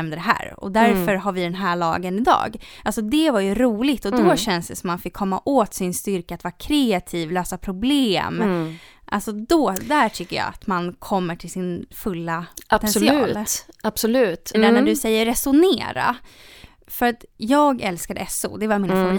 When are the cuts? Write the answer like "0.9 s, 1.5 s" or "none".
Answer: 14.5 s